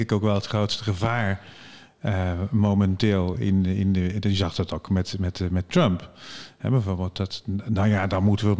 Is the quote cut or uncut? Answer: uncut